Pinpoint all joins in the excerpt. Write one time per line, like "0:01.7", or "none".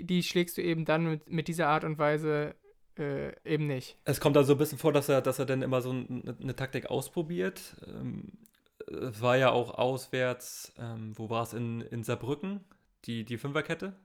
none